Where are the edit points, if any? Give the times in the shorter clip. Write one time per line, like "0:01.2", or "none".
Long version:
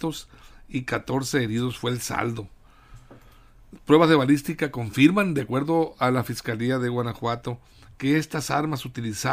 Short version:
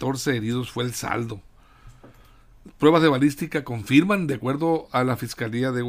none